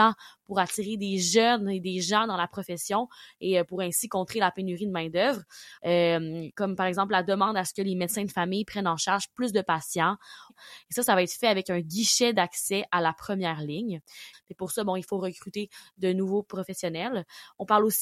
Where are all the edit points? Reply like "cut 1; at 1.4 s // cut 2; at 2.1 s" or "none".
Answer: cut 1; at 5.8 s // cut 2; at 10.5 s // cut 3; at 14.3 s